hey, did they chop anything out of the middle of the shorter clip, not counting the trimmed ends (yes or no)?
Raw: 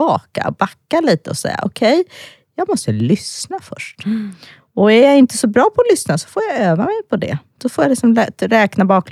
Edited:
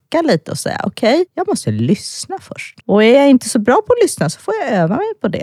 yes